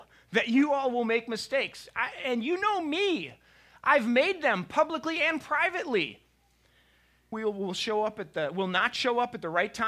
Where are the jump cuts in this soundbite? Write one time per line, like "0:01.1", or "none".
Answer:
0:07.3

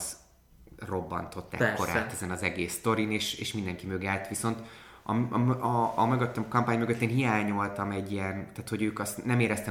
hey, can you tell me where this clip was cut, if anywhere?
none

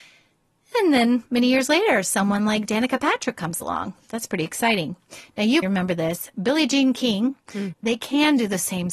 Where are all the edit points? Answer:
0:05.6
0:07.7

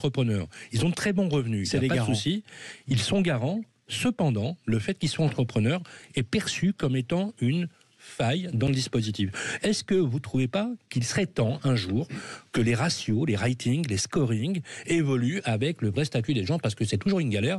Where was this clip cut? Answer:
none

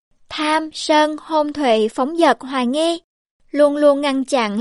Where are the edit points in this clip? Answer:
none

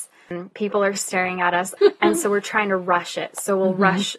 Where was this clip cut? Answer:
0:01.8

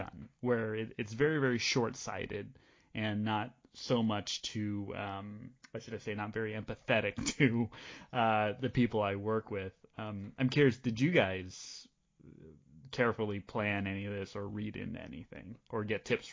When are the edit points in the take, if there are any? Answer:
none

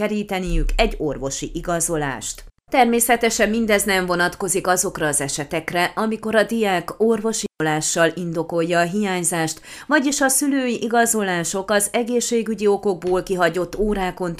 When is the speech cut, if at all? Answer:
none

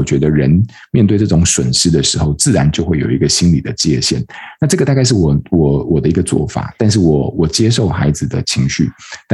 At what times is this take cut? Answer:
none

